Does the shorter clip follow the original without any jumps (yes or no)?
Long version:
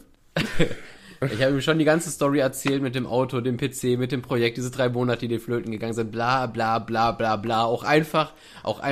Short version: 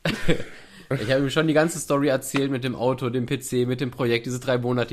yes